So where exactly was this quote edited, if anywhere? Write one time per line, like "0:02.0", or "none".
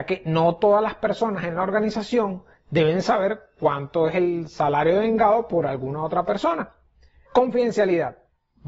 0:07.3

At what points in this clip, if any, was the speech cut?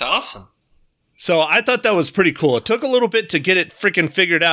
none

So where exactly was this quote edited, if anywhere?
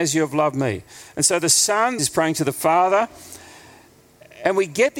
0:02.0

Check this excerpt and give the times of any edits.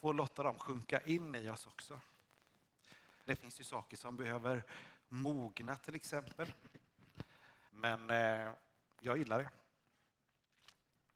0:03.3
0:07.7

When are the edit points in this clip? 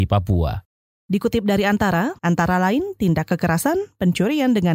0:01.0
0:02.2

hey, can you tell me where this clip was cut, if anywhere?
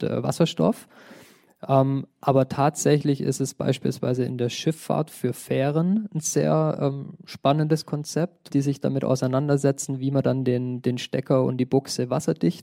0:08.5

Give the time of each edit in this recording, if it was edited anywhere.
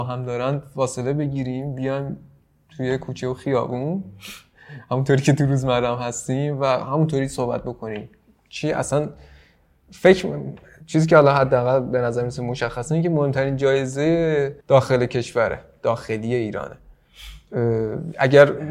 0:14.6

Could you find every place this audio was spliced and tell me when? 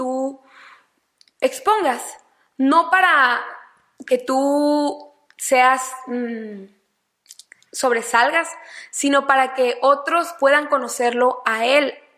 none

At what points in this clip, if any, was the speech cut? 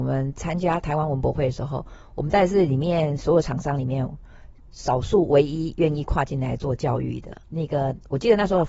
0:07.4

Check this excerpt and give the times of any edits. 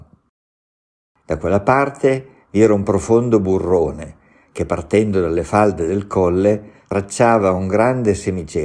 0:01.2

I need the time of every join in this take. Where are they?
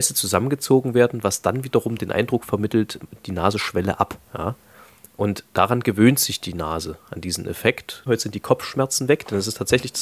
0:04.2
0:08.1

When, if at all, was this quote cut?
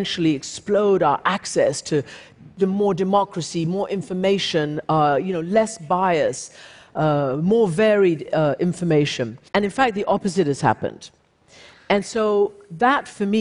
0:09.5

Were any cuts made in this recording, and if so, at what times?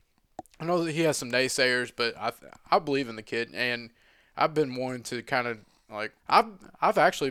0:06.2

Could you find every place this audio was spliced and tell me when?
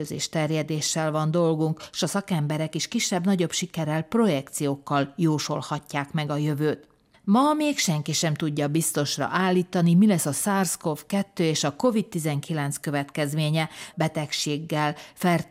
0:07.1
0:13.9

